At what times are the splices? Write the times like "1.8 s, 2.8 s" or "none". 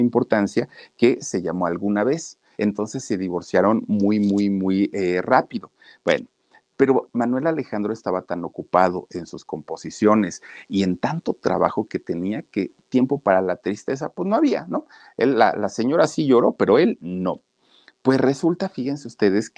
2.5 s